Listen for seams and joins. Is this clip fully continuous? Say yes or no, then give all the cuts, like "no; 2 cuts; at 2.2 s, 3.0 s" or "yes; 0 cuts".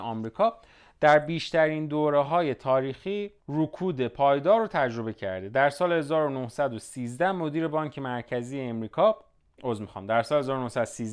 no; 1 cut; at 3.4 s